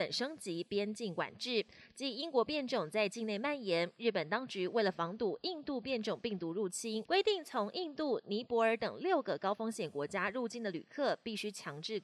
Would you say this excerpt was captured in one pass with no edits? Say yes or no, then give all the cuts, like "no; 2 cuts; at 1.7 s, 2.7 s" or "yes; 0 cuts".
no; 1 cut; at 7.0 s